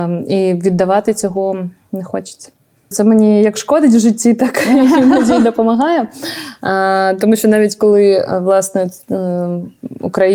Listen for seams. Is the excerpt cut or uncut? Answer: cut